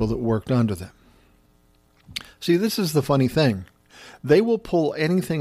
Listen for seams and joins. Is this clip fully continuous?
yes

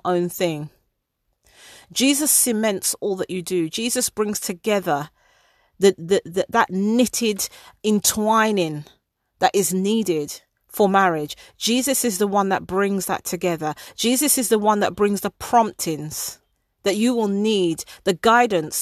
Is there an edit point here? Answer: yes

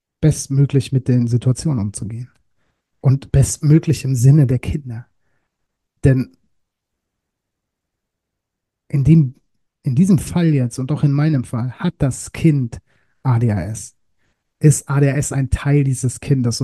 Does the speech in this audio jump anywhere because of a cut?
no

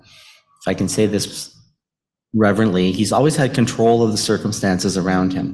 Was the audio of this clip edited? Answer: no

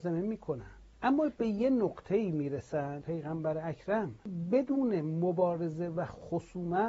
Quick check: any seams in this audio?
yes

